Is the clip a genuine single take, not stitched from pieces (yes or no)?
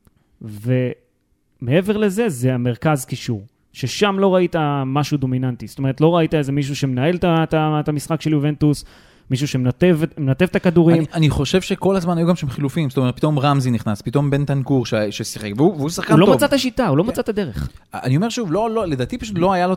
yes